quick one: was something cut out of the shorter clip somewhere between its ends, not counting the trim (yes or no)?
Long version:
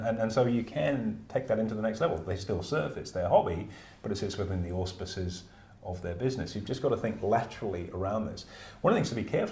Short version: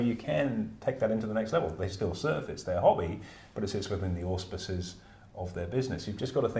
no